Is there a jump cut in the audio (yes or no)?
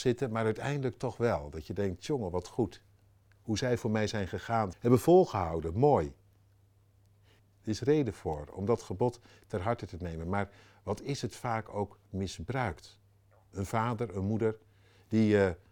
yes